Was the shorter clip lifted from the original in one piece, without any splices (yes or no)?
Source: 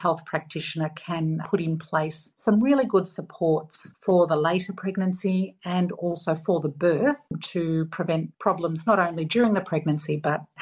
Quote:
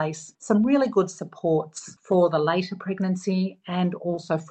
yes